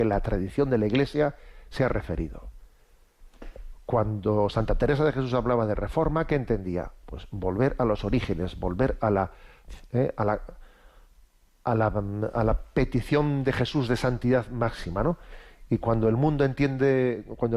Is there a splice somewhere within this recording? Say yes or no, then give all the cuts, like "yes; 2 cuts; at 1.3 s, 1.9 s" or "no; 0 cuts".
no; 0 cuts